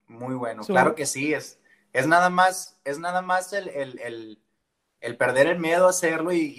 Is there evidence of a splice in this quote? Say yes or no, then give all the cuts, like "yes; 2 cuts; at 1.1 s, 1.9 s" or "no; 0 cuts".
no; 0 cuts